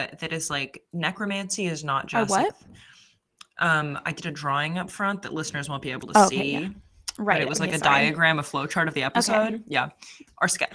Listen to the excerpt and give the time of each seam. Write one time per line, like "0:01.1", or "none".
none